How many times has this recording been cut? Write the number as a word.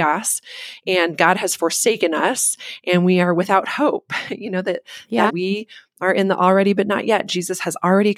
one